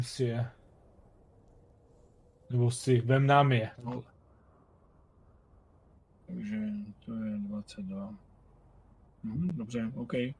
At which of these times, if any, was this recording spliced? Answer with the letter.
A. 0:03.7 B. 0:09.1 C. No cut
A